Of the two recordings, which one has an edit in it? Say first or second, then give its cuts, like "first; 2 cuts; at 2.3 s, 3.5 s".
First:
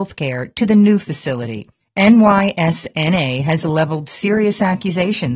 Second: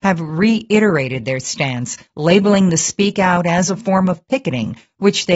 first; 1 cut; at 1.8 s